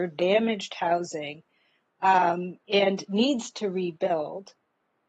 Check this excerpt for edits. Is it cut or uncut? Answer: uncut